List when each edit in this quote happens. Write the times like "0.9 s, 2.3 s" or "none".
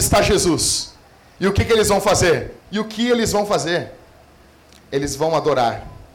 2.6 s

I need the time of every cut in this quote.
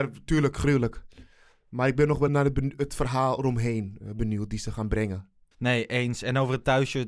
2.3 s, 5.5 s

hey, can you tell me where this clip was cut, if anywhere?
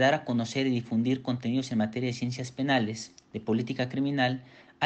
none

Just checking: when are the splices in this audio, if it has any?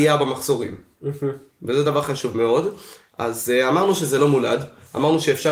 none

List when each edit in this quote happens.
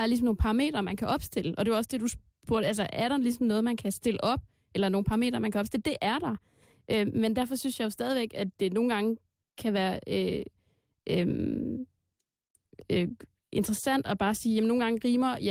none

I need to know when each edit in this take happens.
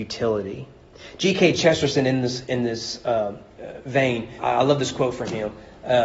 4.4 s

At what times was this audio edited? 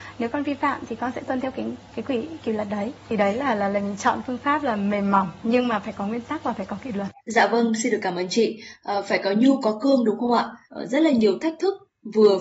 7.2 s, 10.7 s

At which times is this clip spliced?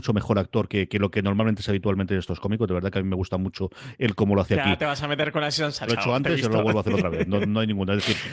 5.9 s

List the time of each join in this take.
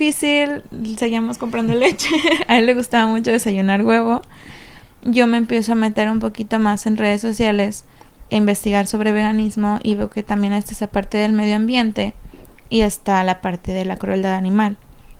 4.8 s, 8.3 s

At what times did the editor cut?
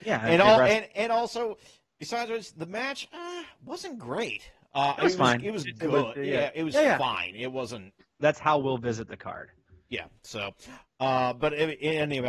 8.2 s

